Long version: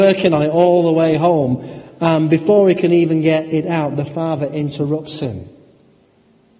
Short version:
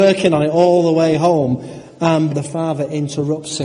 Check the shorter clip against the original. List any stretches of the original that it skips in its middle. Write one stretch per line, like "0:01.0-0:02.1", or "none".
0:02.3-0:03.9